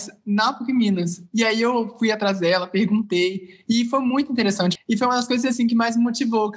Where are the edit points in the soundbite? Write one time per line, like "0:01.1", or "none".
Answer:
0:04.8